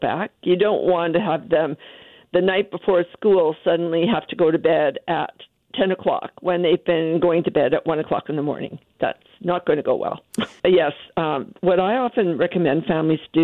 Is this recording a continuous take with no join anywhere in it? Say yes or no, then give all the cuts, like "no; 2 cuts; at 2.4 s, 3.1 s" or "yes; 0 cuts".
no; 1 cut; at 10.6 s